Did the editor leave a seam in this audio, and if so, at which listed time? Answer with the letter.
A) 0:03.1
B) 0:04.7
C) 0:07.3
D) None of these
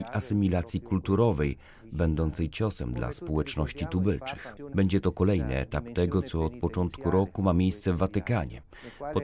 B